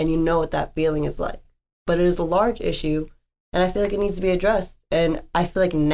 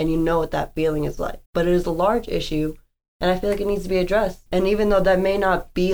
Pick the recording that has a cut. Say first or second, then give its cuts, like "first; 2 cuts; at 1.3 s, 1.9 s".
second; 2 cuts; at 1.4 s, 4.5 s